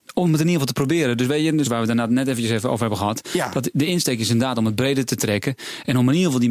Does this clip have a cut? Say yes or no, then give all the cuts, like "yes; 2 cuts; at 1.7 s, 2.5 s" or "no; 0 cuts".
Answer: yes; 1 cut; at 1.6 s